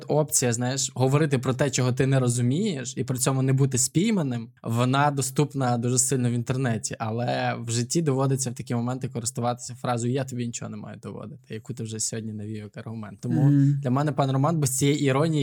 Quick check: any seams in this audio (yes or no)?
yes